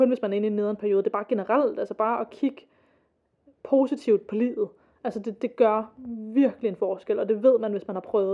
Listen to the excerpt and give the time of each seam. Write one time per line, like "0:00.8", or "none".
none

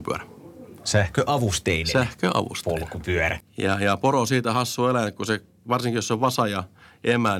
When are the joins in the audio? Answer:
0:03.4

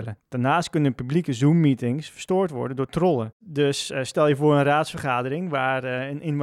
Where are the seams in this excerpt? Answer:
none

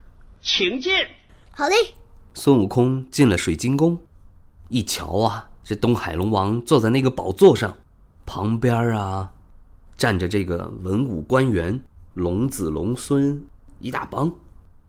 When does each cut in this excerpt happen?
0:12.1

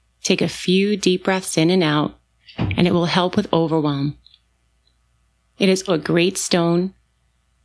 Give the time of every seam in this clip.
0:05.9

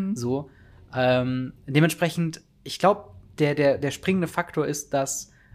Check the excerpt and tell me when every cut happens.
none

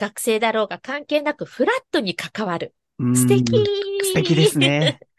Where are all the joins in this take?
none

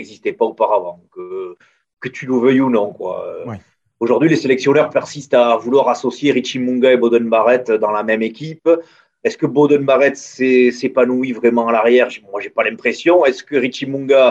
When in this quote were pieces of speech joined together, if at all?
none

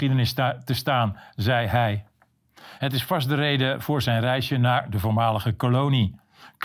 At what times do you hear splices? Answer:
0:02.8

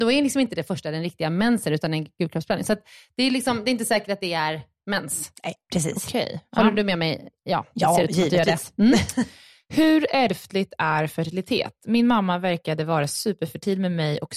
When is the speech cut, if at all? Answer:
none

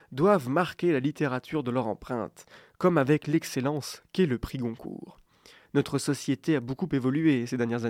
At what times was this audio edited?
0:05.6

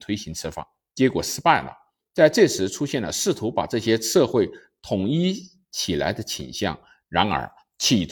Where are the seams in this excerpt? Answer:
0:02.0

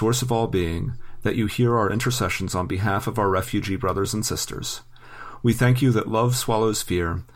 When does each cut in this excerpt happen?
none

